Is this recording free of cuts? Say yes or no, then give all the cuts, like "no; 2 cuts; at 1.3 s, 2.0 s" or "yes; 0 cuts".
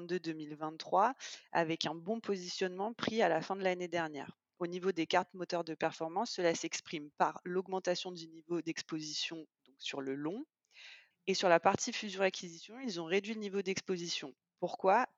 no; 1 cut; at 11.1 s